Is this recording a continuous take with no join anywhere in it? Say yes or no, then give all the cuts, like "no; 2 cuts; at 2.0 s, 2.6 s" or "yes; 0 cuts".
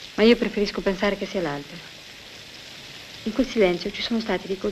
yes; 0 cuts